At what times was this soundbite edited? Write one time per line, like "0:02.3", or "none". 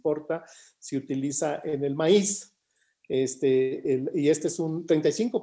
none

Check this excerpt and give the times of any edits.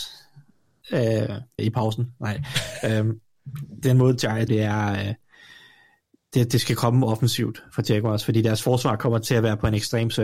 0:01.6
0:04.5

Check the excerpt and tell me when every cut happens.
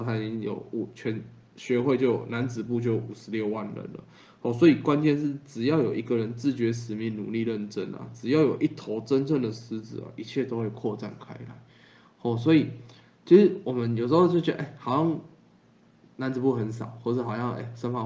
none

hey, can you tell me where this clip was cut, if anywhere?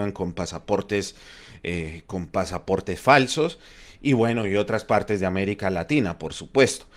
none

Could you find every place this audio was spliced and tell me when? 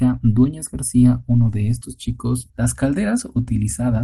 0:02.5

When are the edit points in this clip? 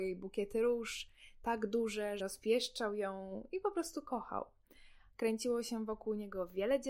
0:02.2
0:05.1

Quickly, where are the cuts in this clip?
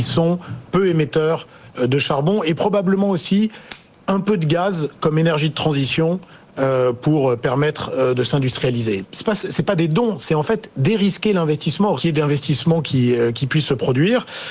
0:09.0
0:12.0

